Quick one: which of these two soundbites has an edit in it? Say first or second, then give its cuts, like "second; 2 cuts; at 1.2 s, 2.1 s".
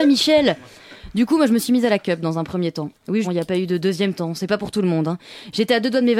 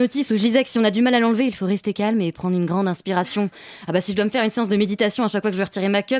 first; 1 cut; at 3.2 s